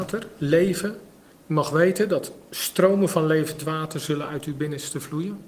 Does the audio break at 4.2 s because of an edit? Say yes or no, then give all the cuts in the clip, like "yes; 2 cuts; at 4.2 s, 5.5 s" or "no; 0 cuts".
no; 1 cut; at 1.3 s